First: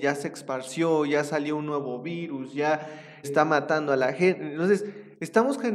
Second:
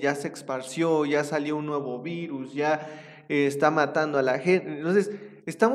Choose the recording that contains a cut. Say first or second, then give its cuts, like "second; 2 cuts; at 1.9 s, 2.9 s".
first; 1 cut; at 3.2 s